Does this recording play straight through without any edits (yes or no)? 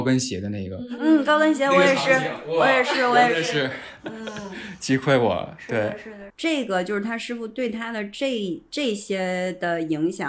no